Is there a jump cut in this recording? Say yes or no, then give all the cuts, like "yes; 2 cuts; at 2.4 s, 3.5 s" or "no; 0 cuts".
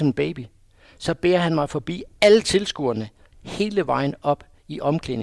no; 0 cuts